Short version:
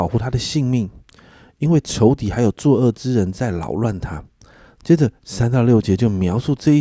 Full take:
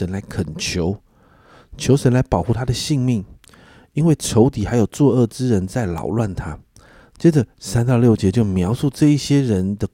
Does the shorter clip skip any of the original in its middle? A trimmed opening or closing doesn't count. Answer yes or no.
no